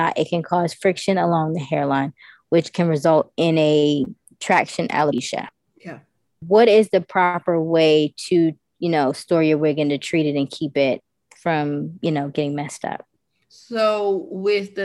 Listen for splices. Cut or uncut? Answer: uncut